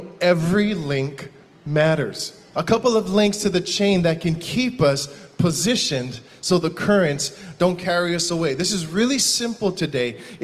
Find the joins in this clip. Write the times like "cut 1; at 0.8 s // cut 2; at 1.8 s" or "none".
cut 1; at 2.5 s